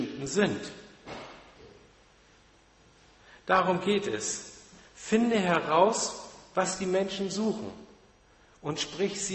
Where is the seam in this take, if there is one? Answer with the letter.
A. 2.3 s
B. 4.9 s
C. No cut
C